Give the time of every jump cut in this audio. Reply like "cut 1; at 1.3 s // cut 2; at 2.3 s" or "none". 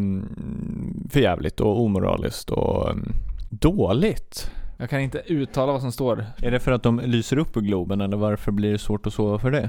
cut 1; at 4.8 s // cut 2; at 6.4 s